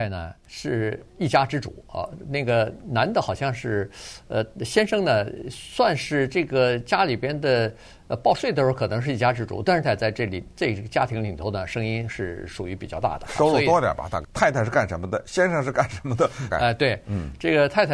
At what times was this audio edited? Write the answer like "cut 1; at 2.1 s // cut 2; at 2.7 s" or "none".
cut 1; at 9.8 s // cut 2; at 14.2 s // cut 3; at 16.5 s